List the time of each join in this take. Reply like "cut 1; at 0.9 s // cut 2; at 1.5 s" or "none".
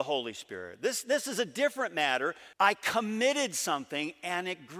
cut 1; at 2.5 s